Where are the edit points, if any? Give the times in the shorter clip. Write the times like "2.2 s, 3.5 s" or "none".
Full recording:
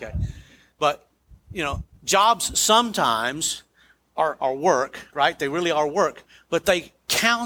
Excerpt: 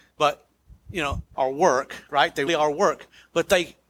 1.3 s, 2.5 s